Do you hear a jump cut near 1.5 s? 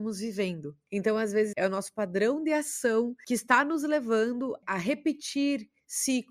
yes; 1 cut; at 1.5 s

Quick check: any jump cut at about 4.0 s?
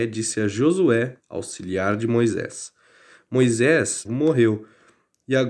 yes; 2 cuts; at 1.2 s, 4.0 s

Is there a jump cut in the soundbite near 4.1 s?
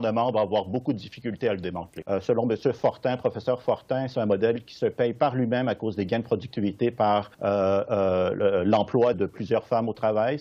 no; 3 cuts; at 2.0 s, 7.3 s, 9.1 s

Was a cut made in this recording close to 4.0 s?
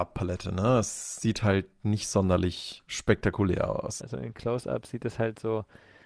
yes; 1 cut; at 4.0 s

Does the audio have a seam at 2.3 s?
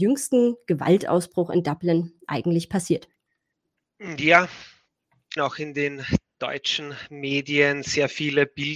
no; 1 cut; at 5.4 s

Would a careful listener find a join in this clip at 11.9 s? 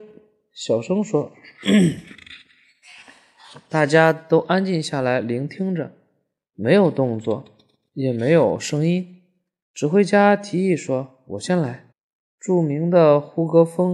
yes; 2 cuts; at 9.6 s, 11.9 s

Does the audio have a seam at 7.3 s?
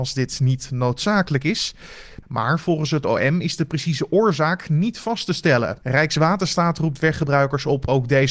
no; 2 cuts; at 2.2 s, 5.8 s

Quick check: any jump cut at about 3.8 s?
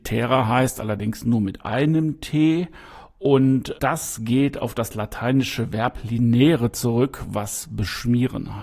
yes; 1 cut; at 3.8 s

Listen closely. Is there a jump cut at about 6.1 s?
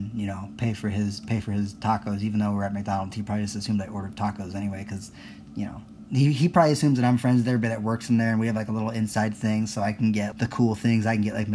no; 1 cut; at 10.3 s

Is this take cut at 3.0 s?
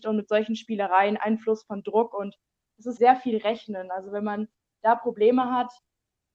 yes; 1 cut; at 3.0 s

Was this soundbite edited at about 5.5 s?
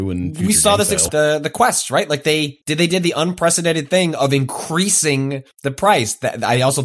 yes; 3 cuts; at 1.1 s, 2.6 s, 5.5 s

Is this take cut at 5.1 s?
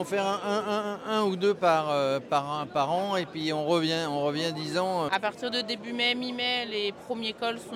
yes; 1 cut; at 5.1 s

